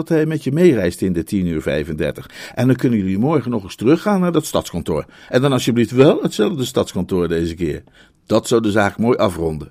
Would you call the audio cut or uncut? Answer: uncut